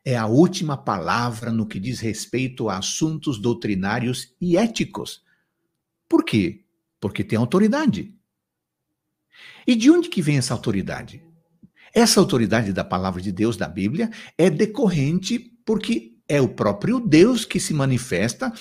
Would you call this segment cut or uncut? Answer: uncut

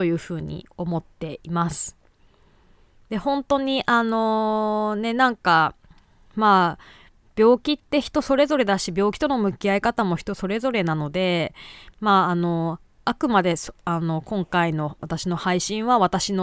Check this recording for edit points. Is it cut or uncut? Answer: uncut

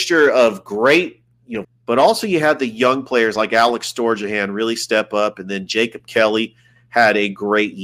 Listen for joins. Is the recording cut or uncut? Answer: cut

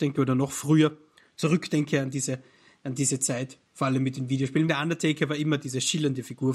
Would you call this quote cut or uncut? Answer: cut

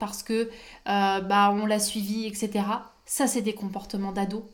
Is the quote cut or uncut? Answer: uncut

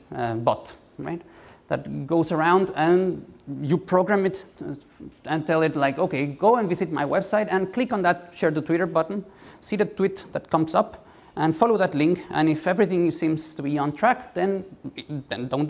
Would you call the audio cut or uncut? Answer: uncut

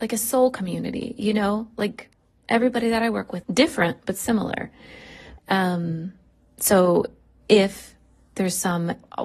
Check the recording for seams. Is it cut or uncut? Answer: cut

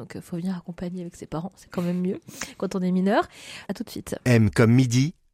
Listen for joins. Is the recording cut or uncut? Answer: cut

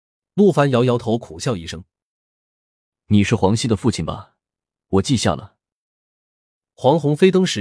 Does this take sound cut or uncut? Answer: uncut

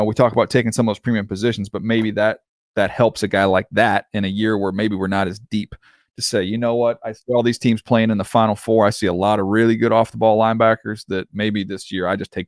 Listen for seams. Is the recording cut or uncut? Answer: uncut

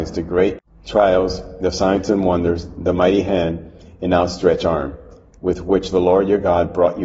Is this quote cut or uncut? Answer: uncut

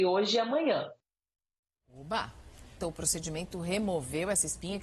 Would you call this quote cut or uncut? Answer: cut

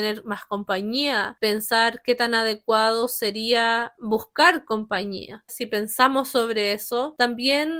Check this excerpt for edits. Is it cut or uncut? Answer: cut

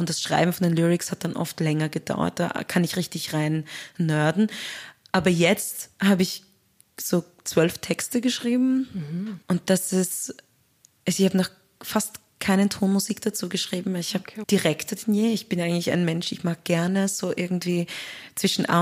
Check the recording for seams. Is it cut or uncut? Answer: cut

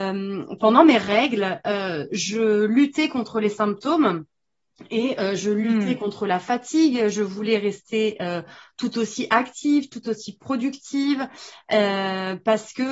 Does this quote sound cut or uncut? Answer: uncut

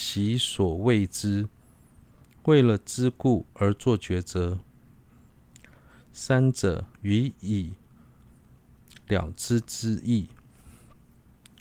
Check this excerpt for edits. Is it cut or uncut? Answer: cut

